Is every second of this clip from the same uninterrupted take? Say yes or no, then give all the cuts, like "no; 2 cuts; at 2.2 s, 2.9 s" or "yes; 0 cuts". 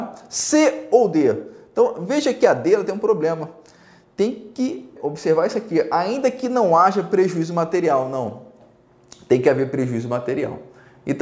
no; 1 cut; at 5.0 s